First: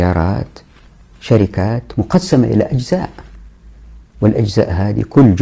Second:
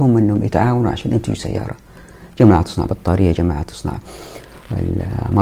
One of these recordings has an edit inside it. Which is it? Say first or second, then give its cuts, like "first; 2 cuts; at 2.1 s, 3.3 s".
second; 1 cut; at 3.3 s